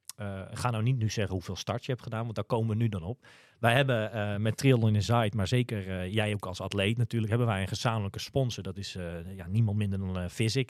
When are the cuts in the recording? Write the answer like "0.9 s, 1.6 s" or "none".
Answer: none